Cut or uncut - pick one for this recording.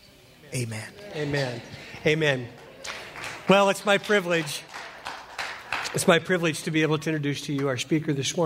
uncut